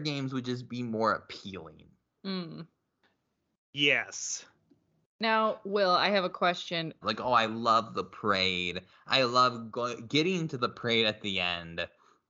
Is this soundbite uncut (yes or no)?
no